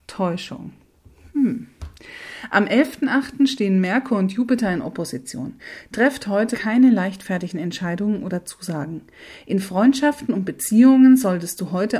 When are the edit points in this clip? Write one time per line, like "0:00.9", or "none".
0:06.5